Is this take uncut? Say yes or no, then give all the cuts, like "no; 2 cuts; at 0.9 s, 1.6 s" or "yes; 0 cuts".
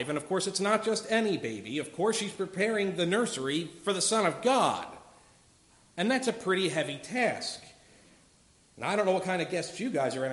yes; 0 cuts